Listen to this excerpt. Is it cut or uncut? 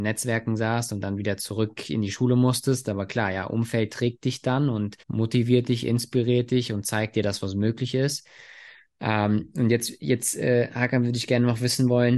cut